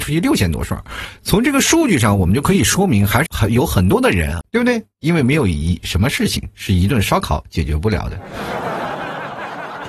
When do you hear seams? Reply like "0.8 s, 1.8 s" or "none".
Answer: 3.3 s, 4.4 s